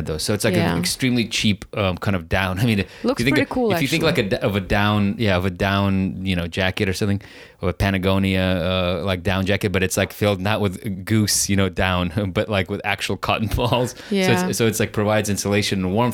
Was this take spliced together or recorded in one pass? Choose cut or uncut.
uncut